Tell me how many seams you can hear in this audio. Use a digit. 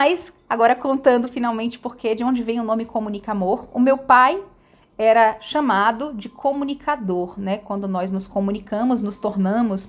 0